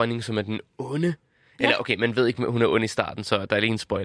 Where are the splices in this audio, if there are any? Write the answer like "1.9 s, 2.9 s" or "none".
none